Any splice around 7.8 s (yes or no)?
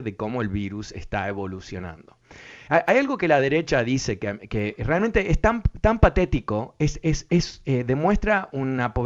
no